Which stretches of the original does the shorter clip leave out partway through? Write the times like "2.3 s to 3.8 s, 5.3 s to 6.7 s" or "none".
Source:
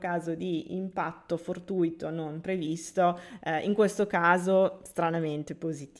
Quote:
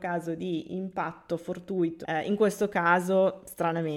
2.0 s to 3.4 s

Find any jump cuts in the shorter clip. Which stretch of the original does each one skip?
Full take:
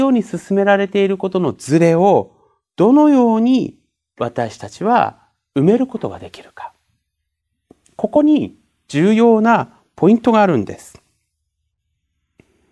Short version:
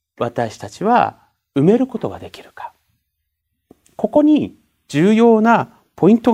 none

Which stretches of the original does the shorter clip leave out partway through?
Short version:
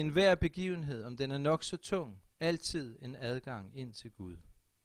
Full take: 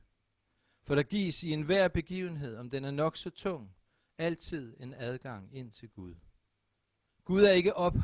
3.8 s to 4.1 s

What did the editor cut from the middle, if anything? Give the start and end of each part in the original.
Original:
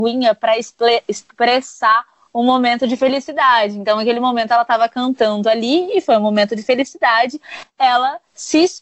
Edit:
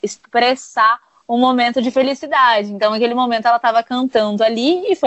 none

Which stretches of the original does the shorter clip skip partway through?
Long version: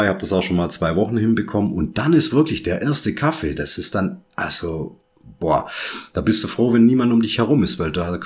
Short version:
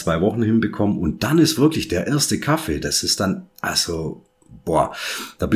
none

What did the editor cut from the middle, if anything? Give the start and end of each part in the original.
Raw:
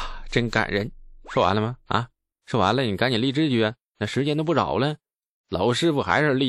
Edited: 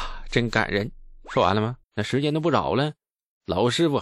1.8 s to 3.9 s

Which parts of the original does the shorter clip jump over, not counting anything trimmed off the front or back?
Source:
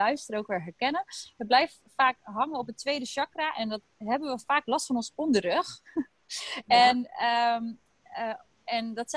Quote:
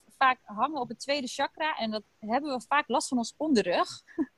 none

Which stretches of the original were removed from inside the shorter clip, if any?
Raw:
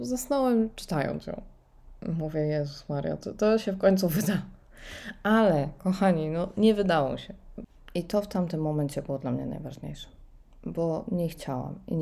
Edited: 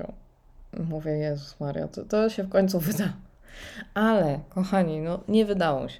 none

